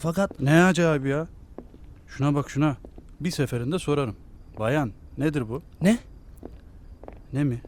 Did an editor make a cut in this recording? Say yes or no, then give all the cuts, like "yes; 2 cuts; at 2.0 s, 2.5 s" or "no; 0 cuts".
yes; 1 cut; at 3.2 s